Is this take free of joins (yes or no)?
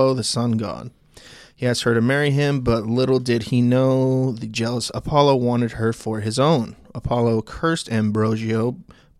yes